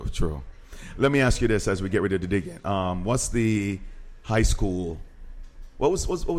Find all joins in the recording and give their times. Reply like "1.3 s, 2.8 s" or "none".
none

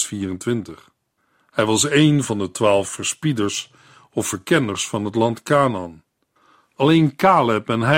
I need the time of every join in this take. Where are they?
none

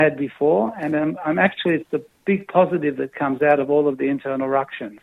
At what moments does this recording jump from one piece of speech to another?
none

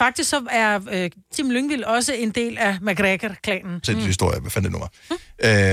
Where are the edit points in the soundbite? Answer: 1.3 s, 3.8 s

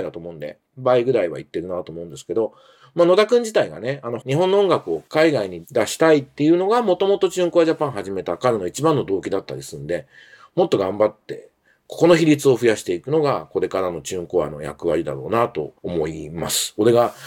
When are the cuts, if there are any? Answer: 4.2 s, 15.8 s

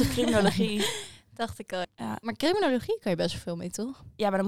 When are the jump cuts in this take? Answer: 1.8 s

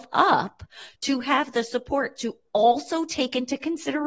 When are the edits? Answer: none

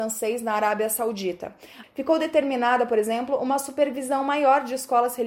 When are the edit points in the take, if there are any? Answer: 1.8 s

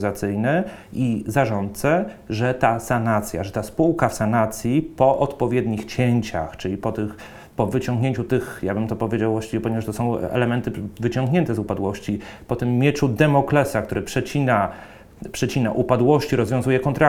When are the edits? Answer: none

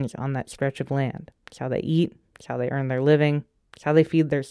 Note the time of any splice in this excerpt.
none

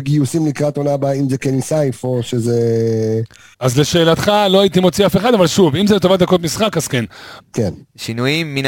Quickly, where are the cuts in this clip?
3.5 s, 7.4 s

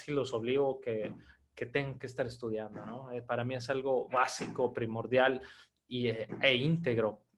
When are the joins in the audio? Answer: none

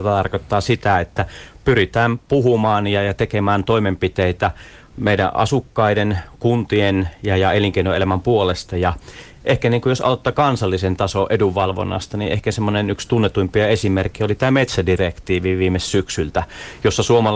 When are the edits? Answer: none

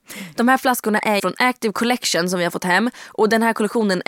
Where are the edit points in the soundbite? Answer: 1.2 s

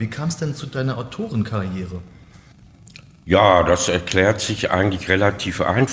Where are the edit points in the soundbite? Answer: none

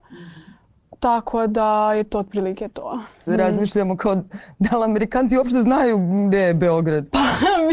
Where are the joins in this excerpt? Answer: 3.3 s

